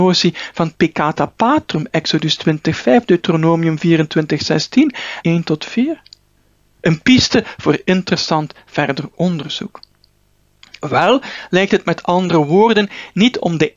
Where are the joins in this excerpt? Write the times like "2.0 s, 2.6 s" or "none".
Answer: 5.2 s